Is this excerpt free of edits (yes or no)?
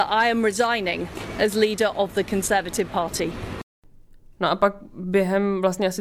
yes